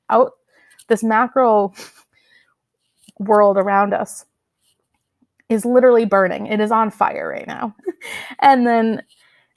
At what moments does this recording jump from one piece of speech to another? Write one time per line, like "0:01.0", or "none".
0:07.8